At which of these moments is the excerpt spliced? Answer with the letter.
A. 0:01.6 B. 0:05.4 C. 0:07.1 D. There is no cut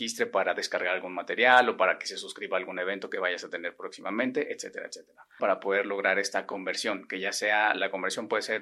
B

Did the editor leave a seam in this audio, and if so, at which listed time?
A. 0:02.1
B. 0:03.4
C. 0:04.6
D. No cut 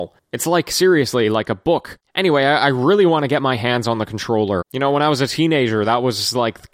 C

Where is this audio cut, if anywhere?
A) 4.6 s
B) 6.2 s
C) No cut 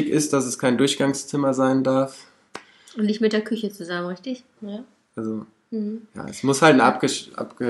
A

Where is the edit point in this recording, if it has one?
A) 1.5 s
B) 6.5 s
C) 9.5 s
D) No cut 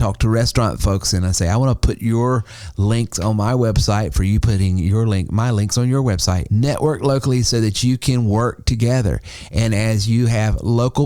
B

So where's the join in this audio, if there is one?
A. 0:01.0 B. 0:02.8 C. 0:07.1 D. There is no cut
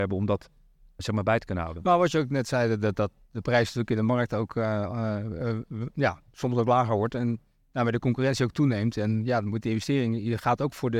A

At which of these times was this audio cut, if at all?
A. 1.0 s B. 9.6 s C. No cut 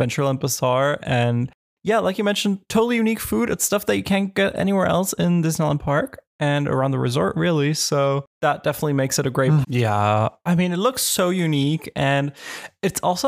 B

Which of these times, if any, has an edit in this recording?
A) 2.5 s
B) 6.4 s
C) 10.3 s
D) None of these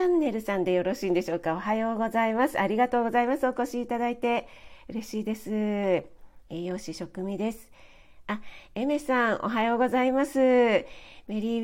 D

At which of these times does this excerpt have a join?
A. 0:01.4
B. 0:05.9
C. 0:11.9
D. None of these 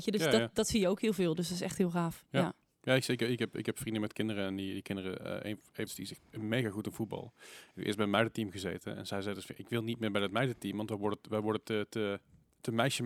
B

